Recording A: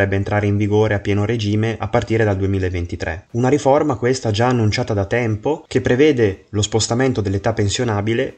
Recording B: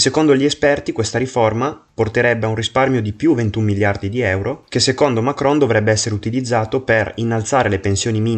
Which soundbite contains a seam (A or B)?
A